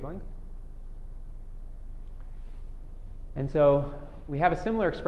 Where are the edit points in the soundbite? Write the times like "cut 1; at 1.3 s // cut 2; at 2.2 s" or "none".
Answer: none